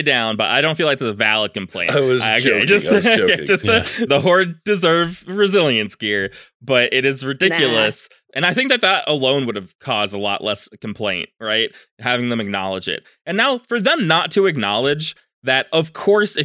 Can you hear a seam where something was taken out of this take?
yes; 2 cuts; at 4.1 s, 8.3 s

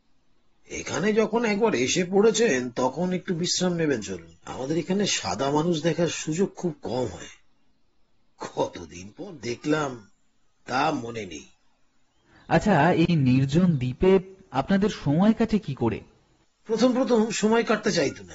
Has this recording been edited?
yes; 1 cut; at 4.4 s

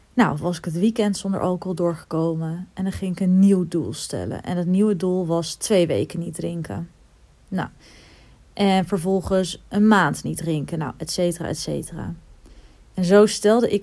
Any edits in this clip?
no; 0 cuts

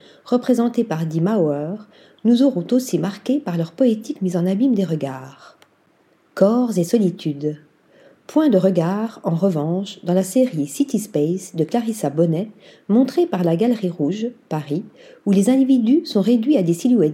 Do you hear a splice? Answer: no; 0 cuts

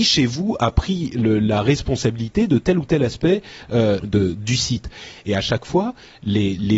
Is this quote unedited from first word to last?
no; 1 cut; at 4.0 s

